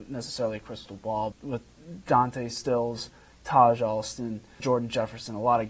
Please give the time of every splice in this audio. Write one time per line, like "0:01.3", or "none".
0:01.3
0:04.6